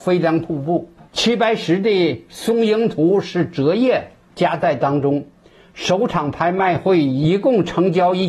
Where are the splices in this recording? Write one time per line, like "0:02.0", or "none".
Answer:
none